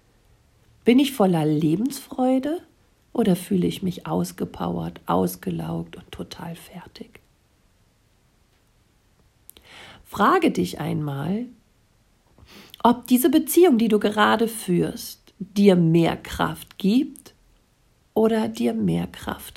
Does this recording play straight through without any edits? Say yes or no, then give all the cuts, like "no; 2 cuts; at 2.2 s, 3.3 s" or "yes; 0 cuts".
yes; 0 cuts